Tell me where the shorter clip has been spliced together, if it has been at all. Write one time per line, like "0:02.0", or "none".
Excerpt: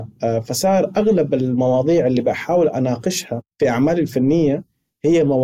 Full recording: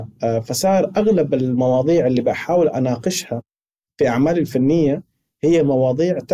0:03.5